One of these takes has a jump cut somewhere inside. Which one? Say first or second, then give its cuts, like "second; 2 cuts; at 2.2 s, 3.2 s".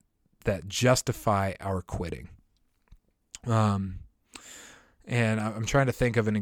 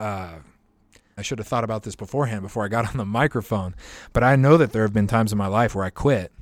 second; 1 cut; at 1.2 s